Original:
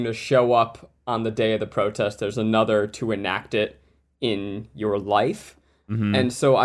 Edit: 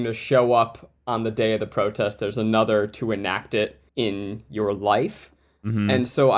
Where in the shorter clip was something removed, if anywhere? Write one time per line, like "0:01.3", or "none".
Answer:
0:03.9